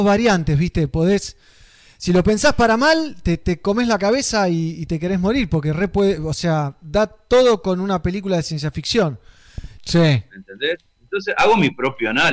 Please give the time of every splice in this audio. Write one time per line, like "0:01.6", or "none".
0:09.8